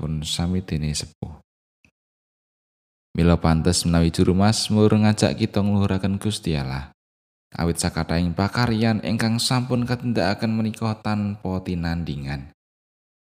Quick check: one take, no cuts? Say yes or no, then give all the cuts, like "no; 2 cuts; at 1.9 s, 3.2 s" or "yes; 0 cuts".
yes; 0 cuts